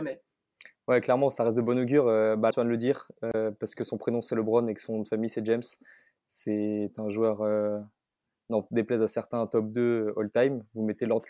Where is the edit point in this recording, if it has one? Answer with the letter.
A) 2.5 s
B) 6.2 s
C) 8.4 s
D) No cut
A